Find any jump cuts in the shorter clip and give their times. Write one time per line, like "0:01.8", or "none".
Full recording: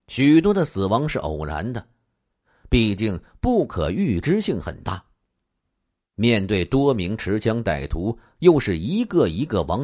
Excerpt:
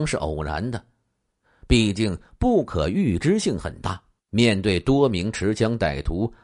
0:04.2